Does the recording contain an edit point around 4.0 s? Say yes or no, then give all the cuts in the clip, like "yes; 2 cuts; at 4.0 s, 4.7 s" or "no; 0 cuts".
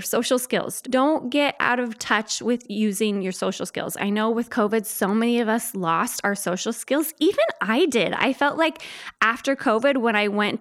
no; 0 cuts